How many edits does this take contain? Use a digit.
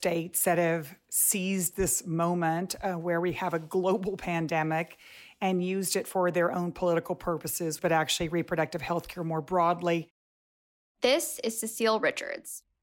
1